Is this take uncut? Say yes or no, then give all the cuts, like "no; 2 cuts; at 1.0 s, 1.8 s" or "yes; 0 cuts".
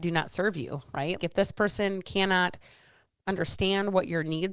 no; 1 cut; at 1.2 s